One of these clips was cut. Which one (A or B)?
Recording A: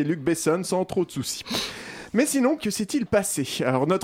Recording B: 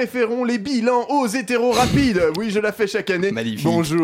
A